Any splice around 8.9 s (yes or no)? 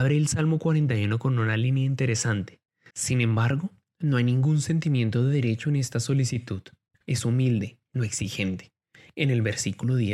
no